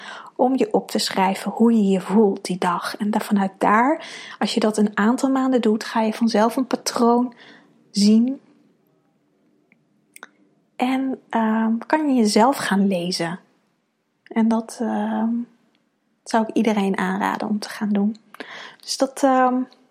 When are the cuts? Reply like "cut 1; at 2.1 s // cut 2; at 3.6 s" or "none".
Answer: none